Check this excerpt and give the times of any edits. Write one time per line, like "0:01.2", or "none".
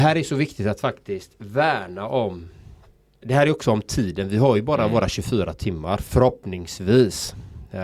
none